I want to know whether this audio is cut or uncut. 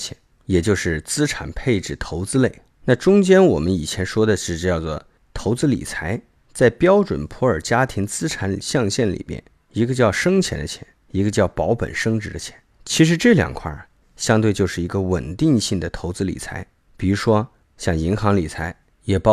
uncut